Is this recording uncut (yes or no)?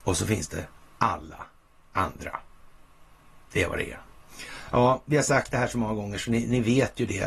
yes